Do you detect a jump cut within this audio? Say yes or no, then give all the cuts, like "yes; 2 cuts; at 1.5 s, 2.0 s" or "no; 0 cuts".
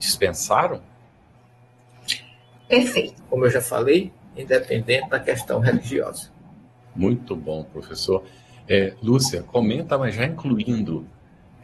yes; 1 cut; at 3.2 s